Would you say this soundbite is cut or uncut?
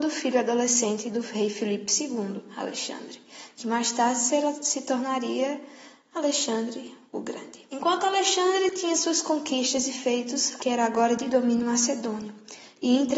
cut